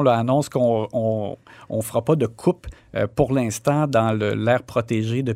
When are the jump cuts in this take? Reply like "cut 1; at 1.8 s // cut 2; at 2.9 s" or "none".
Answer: none